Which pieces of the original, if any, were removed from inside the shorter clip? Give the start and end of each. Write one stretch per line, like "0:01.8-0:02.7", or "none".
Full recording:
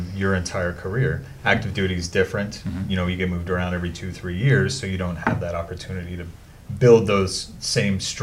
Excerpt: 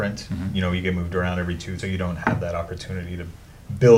0:04.1-0:04.8